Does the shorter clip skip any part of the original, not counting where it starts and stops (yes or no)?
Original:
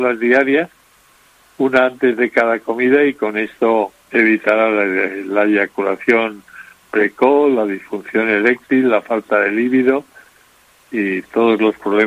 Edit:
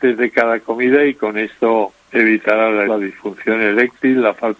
yes